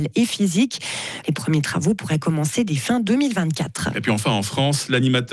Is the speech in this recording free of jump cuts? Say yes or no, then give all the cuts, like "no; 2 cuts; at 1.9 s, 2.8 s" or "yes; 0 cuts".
no; 1 cut; at 1.2 s